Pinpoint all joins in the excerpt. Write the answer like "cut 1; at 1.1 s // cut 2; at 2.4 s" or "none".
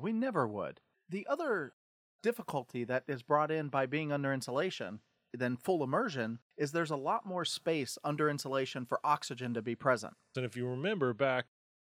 cut 1; at 5.3 s // cut 2; at 6.5 s // cut 3; at 10.3 s